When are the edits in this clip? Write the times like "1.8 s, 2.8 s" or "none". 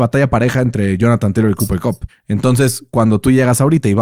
2.1 s